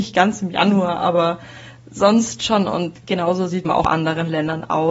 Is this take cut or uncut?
cut